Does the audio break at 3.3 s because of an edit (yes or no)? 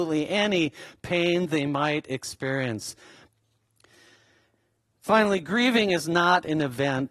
yes